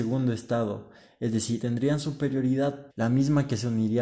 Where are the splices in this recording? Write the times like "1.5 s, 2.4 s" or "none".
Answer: 1.6 s, 2.9 s